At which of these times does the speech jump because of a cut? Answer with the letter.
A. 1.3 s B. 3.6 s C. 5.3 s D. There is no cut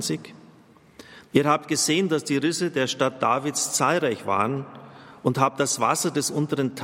A